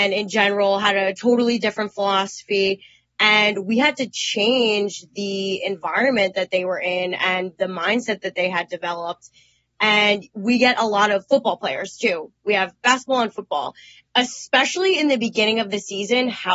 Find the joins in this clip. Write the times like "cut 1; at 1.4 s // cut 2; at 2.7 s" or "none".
cut 1; at 14.1 s